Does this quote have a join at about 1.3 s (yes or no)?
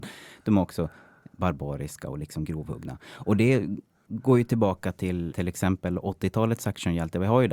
no